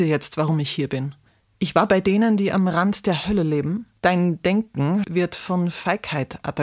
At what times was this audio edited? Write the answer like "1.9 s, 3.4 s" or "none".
4.0 s, 5.0 s